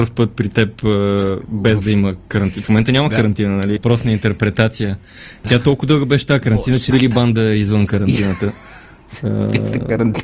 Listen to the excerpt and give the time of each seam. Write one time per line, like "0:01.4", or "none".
0:03.8
0:05.4
0:06.9